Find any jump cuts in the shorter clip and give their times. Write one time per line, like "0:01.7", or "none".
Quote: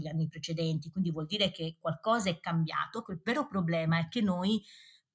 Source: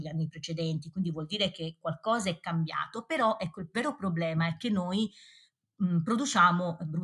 0:03.0